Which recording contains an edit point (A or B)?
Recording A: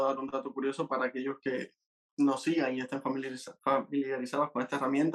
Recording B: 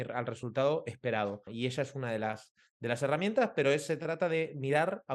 B